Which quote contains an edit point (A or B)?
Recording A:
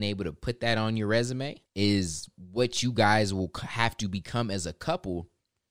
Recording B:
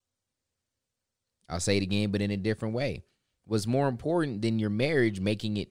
A